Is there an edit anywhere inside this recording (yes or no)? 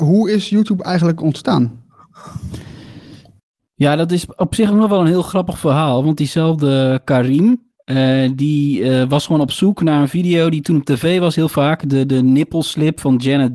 no